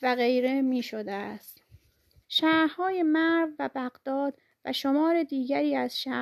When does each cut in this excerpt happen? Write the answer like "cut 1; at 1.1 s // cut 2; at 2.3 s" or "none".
cut 1; at 2.2 s